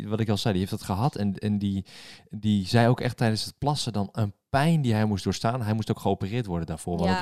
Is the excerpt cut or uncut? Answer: cut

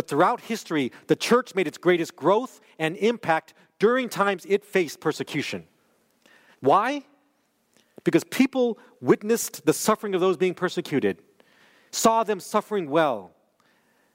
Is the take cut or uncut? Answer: cut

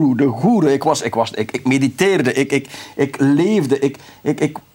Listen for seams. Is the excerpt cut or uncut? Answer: uncut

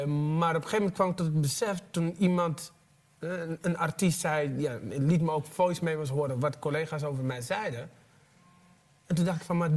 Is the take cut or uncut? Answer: uncut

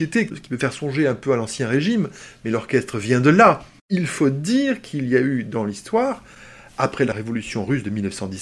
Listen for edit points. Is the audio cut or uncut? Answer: cut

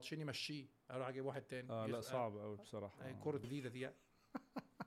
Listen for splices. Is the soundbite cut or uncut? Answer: cut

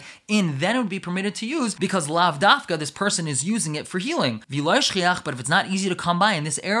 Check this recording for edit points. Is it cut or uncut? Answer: uncut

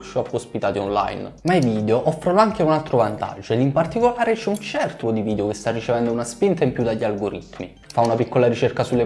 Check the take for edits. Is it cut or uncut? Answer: cut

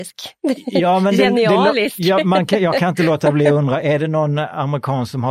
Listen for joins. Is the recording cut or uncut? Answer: uncut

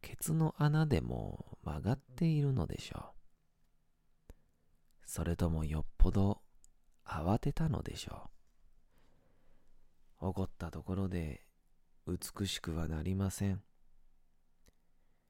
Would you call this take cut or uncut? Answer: uncut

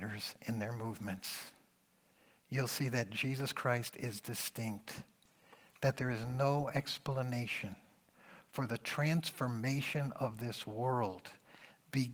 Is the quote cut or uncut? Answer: uncut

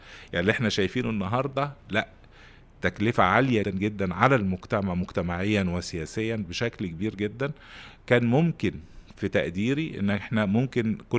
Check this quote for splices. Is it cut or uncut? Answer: cut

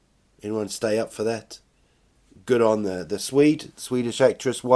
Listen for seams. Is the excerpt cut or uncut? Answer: uncut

